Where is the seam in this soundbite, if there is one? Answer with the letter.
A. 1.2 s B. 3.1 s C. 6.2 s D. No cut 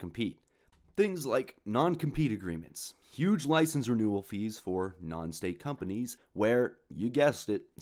C